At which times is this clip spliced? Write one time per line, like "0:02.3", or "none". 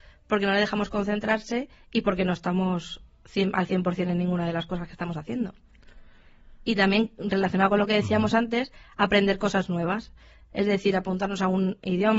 none

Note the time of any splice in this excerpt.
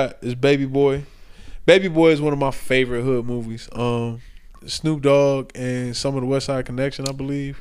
none

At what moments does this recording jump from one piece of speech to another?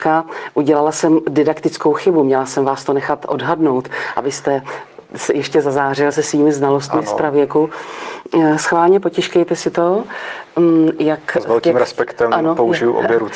none

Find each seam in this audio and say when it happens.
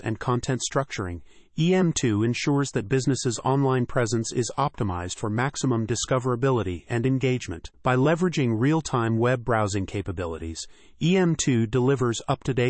0:07.7

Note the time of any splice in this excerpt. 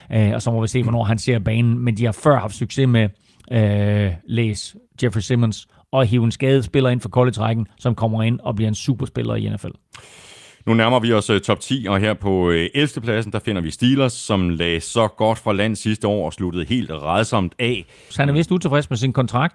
0:18.1

